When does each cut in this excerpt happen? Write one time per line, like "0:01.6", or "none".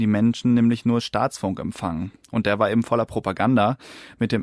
none